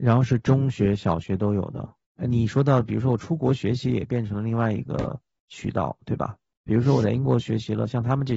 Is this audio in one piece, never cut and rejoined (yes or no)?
no